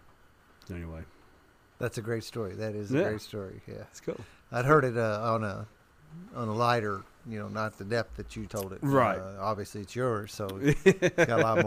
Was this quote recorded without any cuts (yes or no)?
no